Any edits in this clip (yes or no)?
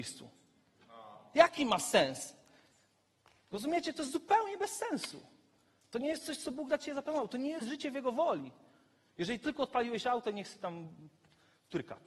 no